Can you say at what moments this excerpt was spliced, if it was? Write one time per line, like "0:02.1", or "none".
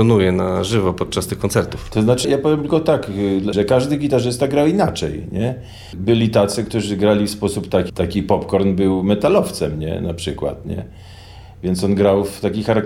0:02.2
0:03.5
0:07.9